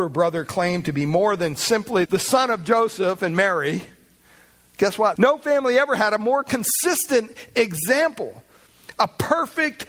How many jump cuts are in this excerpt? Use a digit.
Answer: 2